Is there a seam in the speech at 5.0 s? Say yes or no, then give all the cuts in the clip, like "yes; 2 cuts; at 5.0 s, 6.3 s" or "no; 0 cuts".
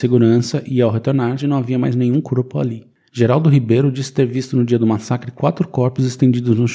no; 2 cuts; at 1.4 s, 3.1 s